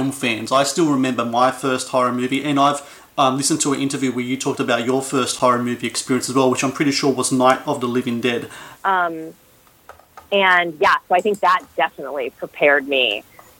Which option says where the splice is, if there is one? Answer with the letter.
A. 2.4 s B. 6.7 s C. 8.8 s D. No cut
C